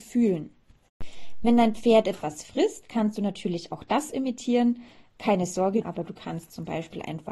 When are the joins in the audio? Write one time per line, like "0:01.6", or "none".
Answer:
0:05.8